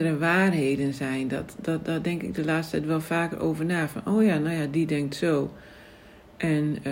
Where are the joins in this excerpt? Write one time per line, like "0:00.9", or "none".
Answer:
none